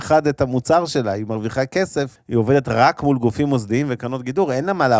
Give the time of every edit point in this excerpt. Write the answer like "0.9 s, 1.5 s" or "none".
2.2 s